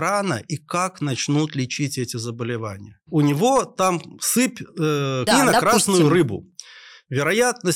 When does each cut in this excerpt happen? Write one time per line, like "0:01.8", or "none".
0:03.1
0:05.3